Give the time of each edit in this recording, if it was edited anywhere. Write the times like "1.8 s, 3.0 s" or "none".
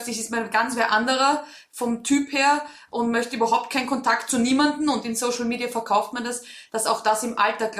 none